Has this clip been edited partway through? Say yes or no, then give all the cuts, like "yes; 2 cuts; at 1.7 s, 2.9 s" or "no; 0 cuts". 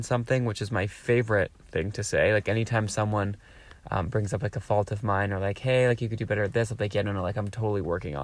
no; 0 cuts